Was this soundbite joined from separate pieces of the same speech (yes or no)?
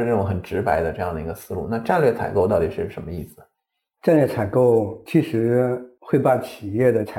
no